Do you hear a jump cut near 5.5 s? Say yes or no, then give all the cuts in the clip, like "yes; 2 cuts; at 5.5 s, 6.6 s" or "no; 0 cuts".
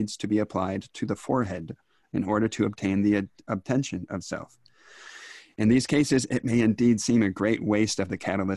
no; 0 cuts